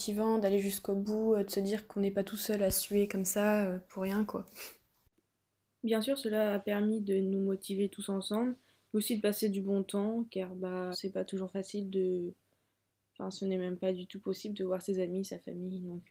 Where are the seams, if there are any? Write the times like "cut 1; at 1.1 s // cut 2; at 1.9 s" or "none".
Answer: cut 1; at 10.9 s

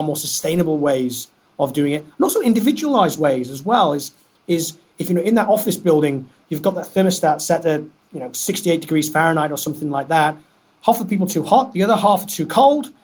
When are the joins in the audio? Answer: none

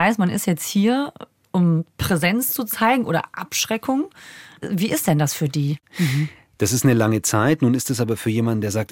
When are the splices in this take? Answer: cut 1; at 5.8 s

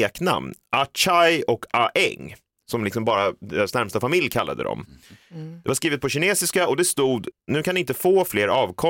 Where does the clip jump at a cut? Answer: none

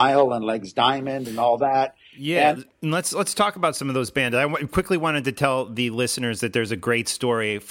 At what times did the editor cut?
none

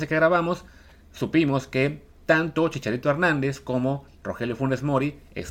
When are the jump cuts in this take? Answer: none

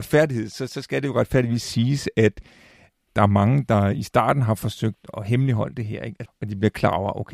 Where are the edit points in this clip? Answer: cut 1; at 5.1 s // cut 2; at 6.3 s

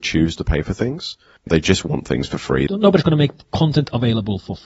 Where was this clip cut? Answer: cut 1; at 1.5 s // cut 2; at 2.7 s

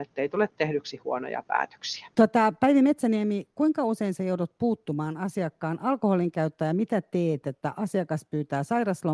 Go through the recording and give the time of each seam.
cut 1; at 7.4 s

